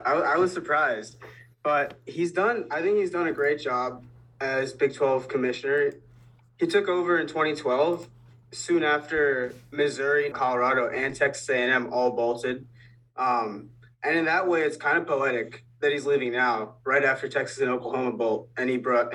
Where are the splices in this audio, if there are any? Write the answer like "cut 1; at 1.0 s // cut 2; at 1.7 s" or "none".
cut 1; at 10.3 s